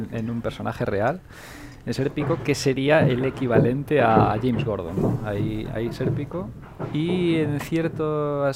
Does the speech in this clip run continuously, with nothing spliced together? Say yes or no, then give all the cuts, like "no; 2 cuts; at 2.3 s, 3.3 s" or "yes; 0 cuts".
yes; 0 cuts